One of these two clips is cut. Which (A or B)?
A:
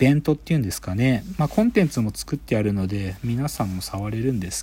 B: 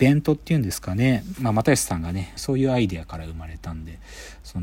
B